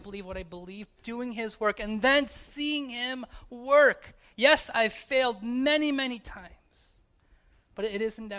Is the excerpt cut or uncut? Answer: cut